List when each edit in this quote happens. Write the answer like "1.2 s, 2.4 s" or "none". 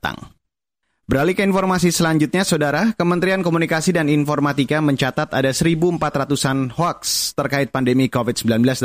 none